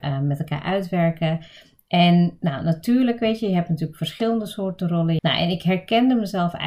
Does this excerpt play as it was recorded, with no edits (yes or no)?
no